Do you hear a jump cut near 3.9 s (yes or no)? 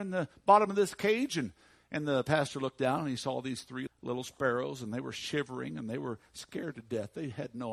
yes